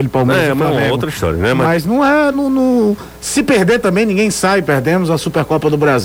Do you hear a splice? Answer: yes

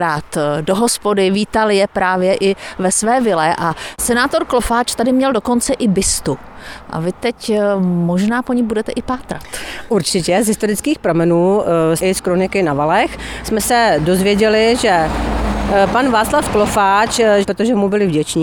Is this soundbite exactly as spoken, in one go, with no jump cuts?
no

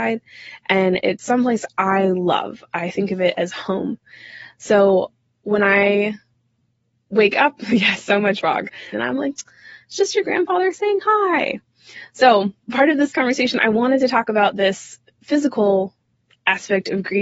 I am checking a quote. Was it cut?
yes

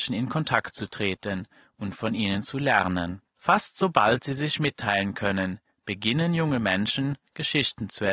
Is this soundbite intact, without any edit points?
yes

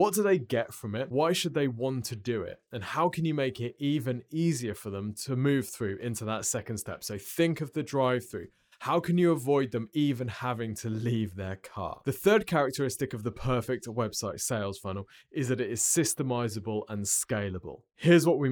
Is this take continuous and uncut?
yes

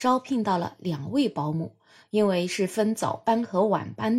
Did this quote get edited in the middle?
yes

